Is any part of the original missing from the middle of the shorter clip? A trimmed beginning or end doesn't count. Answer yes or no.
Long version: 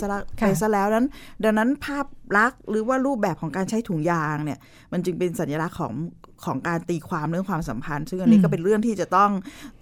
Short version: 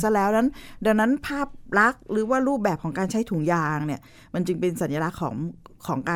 no